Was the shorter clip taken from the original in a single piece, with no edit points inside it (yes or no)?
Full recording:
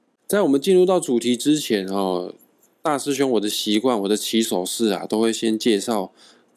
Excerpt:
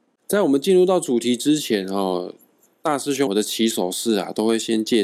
no